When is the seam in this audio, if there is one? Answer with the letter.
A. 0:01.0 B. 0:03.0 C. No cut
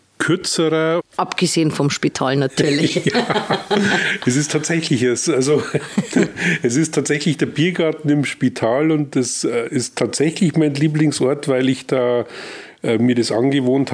A